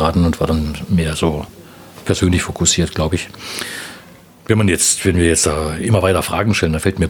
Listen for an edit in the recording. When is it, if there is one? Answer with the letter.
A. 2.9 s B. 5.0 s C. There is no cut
C